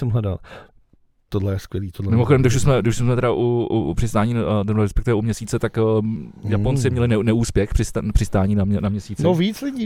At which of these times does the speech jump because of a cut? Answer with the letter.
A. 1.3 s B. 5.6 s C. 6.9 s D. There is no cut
A